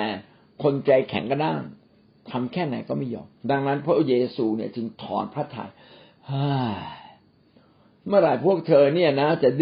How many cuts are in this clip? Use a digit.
1